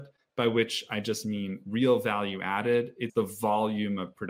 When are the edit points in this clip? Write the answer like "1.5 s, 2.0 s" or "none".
3.1 s